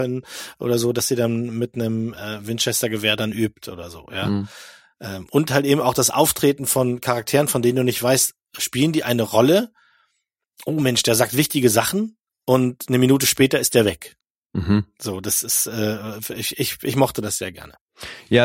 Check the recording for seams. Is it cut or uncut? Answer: uncut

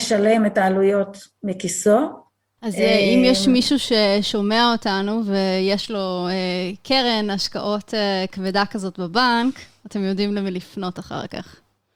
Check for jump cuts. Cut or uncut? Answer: cut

